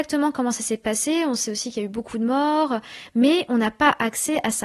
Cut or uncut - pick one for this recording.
uncut